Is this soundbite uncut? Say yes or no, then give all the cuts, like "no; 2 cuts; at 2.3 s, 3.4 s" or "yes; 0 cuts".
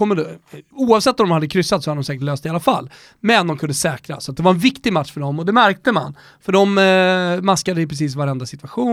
yes; 0 cuts